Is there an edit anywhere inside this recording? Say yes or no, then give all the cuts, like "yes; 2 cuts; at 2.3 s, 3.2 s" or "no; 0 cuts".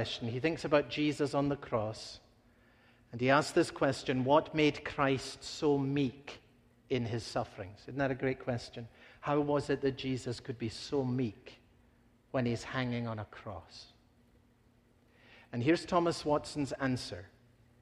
no; 0 cuts